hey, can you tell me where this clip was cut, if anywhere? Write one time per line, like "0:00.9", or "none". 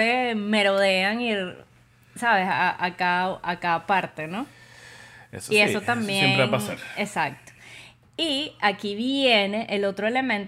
none

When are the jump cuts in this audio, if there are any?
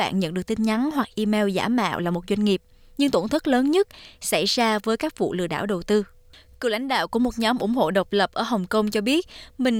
none

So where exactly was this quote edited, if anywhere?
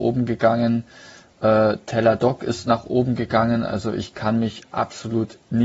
none

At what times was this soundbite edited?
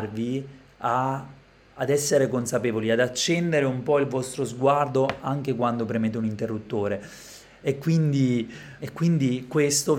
0:07.6
0:08.8

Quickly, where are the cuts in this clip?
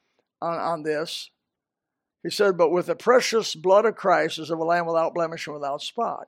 none

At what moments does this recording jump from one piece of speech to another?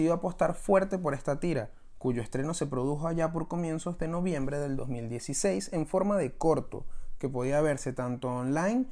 none

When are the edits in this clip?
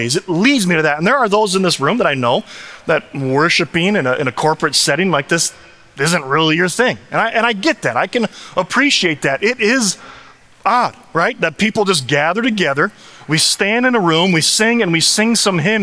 none

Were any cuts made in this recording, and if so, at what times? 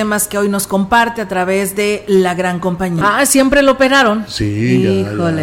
0:03.0

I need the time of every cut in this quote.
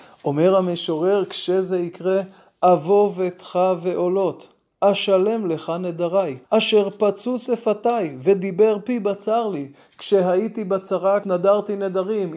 0:06.4
0:11.2

